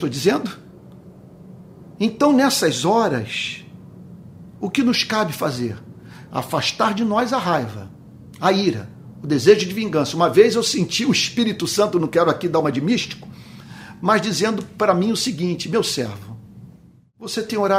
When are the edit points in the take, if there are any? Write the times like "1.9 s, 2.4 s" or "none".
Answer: none

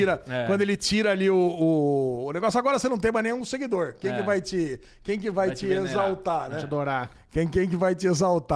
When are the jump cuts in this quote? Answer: none

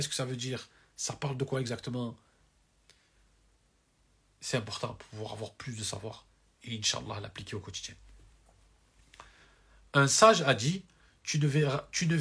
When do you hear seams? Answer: none

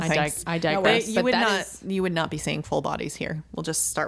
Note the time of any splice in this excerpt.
none

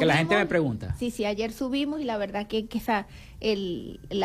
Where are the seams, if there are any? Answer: none

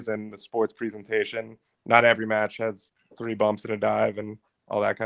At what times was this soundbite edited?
none

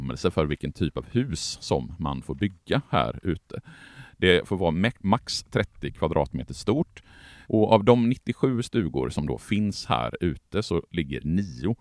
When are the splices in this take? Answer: 7.4 s

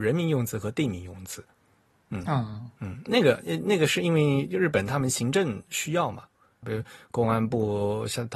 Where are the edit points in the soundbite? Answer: 6.6 s

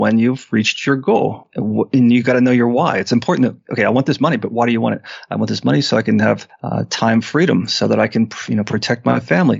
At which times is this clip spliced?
none

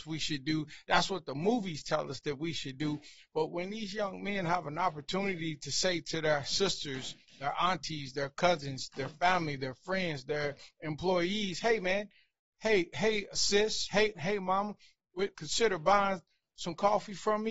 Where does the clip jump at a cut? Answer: 14.1 s, 15.3 s

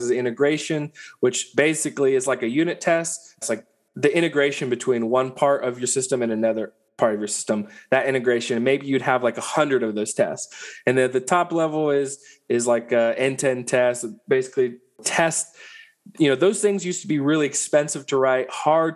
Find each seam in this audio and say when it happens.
3.4 s

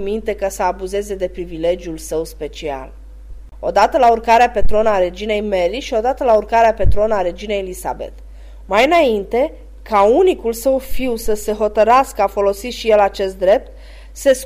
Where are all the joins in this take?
3.5 s, 8.6 s

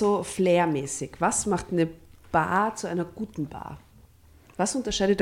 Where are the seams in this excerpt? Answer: none

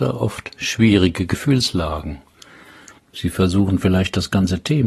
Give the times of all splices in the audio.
3.0 s

